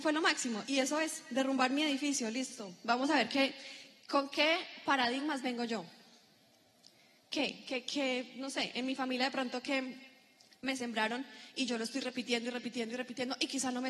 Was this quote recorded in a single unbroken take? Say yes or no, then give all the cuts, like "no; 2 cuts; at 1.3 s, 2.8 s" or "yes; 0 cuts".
yes; 0 cuts